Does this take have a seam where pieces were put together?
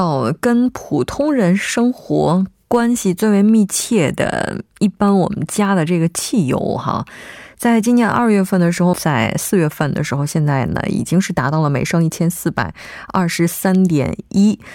yes; 1 cut; at 8.9 s

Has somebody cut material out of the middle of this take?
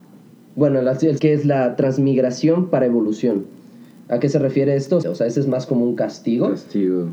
yes; 2 cuts; at 1.2 s, 5.0 s

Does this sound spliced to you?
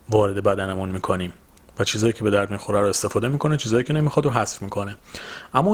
no; 0 cuts

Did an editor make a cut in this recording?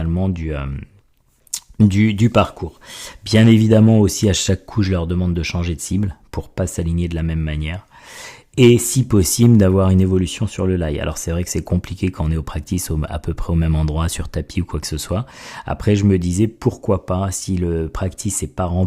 no; 0 cuts

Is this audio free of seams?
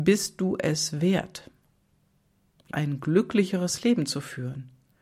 no; 1 cut; at 2.7 s

